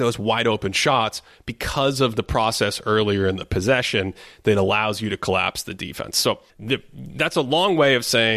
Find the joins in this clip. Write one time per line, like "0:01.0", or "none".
0:06.5